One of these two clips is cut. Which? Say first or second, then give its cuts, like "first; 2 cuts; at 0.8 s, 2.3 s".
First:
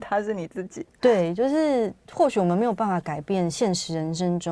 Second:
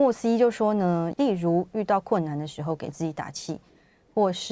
second; 1 cut; at 1.1 s